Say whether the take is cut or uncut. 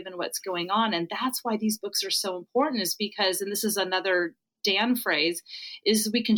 uncut